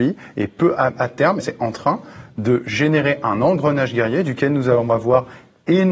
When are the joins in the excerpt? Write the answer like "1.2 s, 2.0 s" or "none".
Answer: 1.4 s